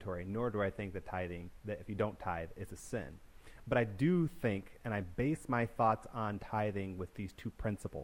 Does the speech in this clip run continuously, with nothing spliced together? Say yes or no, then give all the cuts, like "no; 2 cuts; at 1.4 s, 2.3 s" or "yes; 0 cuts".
yes; 0 cuts